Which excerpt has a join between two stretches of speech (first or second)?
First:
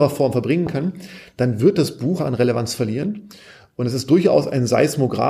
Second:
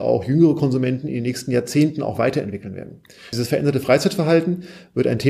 first